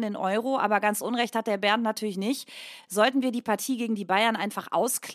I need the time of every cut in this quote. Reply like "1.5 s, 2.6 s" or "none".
none